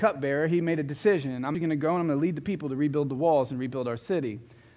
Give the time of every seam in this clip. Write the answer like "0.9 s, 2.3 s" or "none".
1.5 s